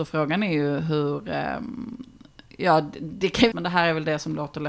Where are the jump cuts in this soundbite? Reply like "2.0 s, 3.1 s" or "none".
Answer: 3.5 s